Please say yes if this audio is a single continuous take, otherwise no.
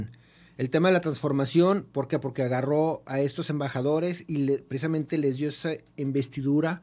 yes